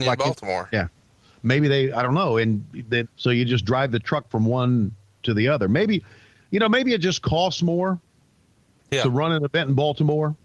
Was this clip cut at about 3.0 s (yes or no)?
yes